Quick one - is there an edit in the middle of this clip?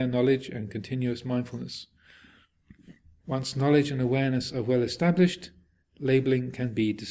yes; 1 cut; at 3.2 s

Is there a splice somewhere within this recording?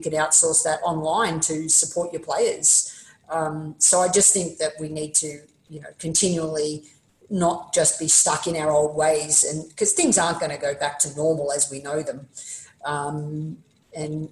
no; 0 cuts

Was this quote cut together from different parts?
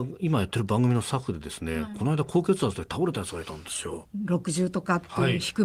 yes; 1 cut; at 4.1 s

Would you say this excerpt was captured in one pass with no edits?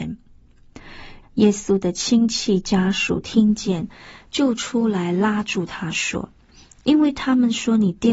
no; 1 cut; at 1.2 s

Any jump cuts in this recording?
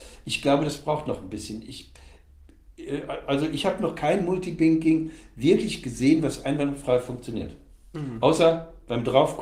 no; 0 cuts

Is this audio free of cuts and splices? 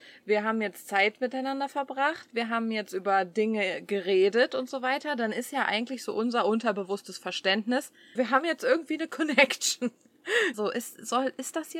no; 2 cuts; at 8.2 s, 10.5 s

